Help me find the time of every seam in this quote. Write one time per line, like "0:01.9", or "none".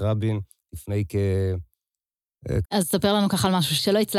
0:02.6